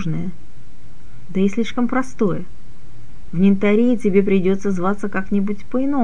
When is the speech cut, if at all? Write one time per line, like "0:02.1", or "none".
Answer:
none